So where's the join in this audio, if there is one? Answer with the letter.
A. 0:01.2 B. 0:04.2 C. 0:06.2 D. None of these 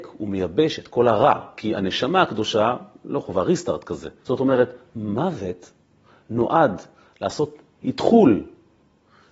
B